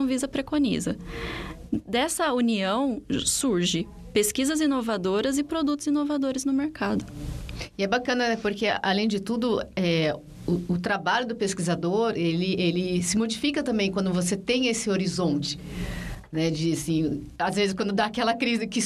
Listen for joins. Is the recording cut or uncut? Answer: uncut